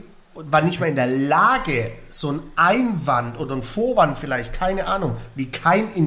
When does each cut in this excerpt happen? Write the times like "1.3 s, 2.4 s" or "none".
none